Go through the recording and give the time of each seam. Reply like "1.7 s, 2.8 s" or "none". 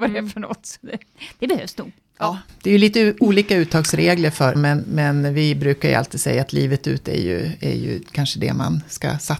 4.6 s